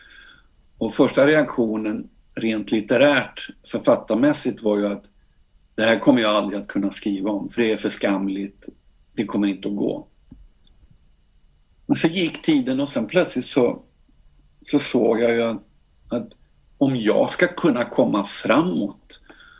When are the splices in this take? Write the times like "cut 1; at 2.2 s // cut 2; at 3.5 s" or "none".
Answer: cut 1; at 3.6 s